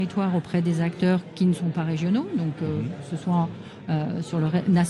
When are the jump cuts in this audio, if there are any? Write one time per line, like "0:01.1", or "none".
none